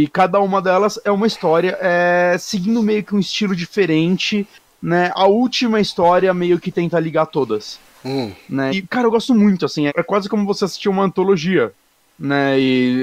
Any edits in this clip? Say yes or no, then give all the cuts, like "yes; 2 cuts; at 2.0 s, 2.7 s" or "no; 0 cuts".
yes; 2 cuts; at 8.7 s, 9.9 s